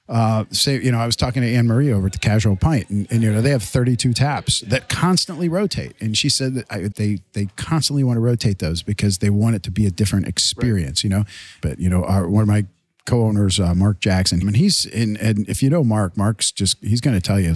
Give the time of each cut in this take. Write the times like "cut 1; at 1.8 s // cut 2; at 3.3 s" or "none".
cut 1; at 6.9 s // cut 2; at 11.6 s // cut 3; at 14.4 s